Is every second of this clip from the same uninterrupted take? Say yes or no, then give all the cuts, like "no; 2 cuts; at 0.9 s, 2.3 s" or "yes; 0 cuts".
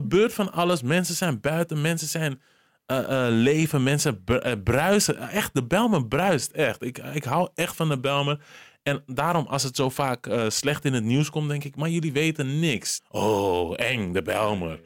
no; 1 cut; at 13.0 s